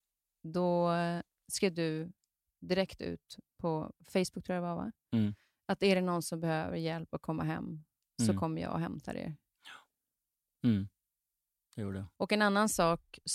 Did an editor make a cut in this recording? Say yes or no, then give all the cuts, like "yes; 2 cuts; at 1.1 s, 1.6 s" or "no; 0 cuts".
yes; 2 cuts; at 10.6 s, 12.1 s